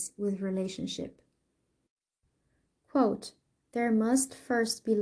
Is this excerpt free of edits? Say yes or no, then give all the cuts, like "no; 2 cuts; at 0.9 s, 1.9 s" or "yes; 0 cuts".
yes; 0 cuts